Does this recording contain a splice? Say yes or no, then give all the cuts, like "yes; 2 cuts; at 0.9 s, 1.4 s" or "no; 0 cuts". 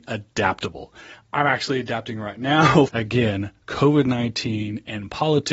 yes; 1 cut; at 2.9 s